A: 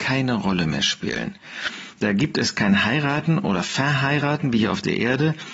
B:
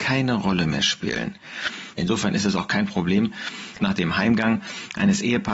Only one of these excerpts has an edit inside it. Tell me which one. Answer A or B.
B